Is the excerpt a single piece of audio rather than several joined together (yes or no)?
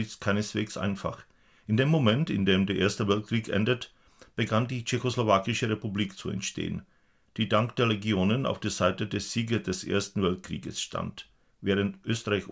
yes